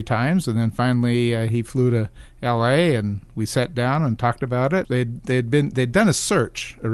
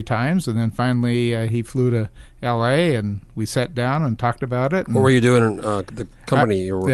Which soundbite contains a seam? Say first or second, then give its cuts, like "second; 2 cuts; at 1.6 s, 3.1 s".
first; 1 cut; at 4.8 s